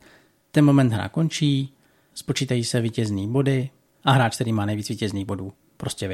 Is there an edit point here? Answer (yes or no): no